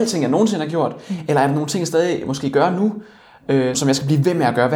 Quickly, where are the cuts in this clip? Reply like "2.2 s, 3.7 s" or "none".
3.7 s